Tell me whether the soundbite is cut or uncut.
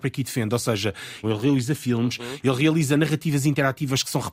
cut